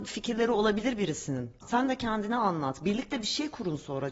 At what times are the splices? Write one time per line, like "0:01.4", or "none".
0:01.6